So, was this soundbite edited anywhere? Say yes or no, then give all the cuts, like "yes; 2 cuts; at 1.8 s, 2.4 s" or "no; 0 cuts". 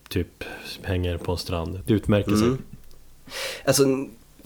yes; 1 cut; at 1.8 s